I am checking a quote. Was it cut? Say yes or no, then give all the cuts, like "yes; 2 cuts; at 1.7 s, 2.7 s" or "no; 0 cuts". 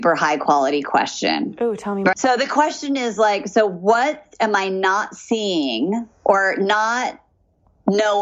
yes; 1 cut; at 2.1 s